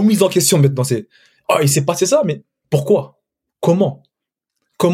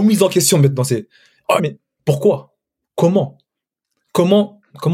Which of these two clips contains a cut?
second; 1 cut; at 1.6 s

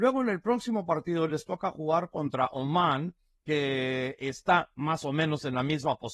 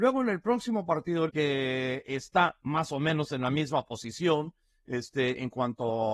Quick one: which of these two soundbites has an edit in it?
second; 1 cut; at 1.3 s

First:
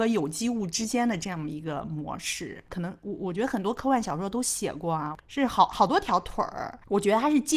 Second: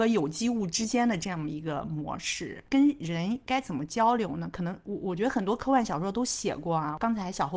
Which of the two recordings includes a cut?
first; 2 cuts; at 2.7 s, 5.2 s

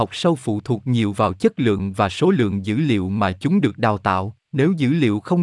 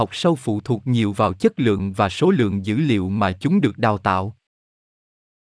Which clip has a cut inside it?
first; 1 cut; at 4.4 s

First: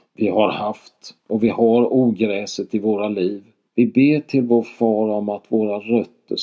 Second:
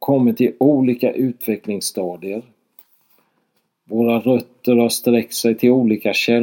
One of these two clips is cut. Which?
first; 1 cut; at 3.7 s

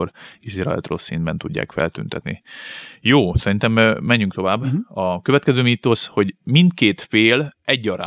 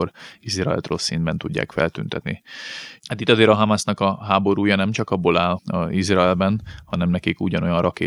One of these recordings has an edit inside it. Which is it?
second; 2 cuts; at 3.0 s, 5.6 s

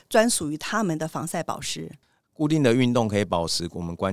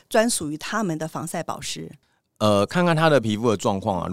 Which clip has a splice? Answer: first; 1 cut; at 2.2 s

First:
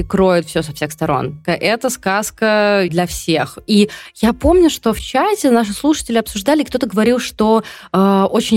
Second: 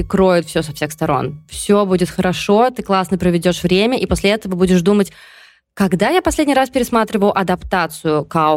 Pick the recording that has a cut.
first; 2 cuts; at 1.4 s, 2.9 s

